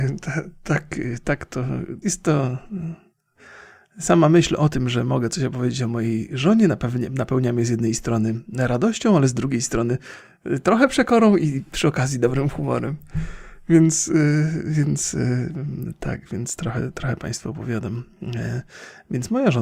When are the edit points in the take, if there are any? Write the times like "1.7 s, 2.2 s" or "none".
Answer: 2.0 s